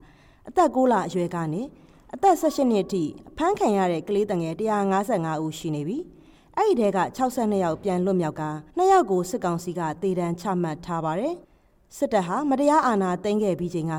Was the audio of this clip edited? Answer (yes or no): yes